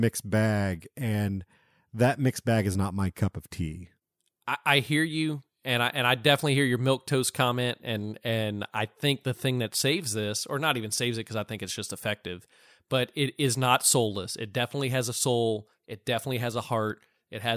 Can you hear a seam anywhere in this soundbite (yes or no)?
no